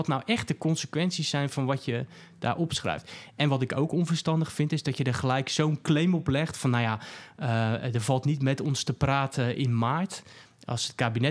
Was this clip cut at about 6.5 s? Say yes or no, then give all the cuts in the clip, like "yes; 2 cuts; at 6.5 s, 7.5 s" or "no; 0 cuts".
no; 0 cuts